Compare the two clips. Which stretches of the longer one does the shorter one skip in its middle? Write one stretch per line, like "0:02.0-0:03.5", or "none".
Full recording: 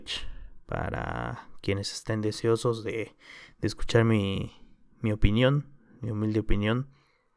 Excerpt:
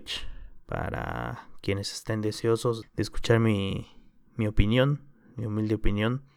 0:02.8-0:03.5